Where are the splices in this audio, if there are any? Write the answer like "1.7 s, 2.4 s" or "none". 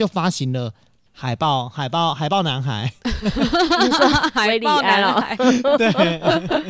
1.1 s